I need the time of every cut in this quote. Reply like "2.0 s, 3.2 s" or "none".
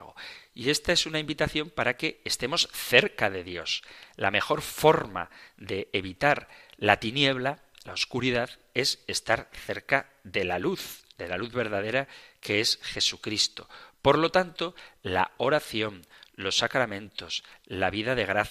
none

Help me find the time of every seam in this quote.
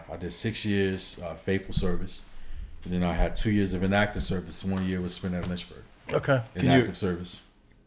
none

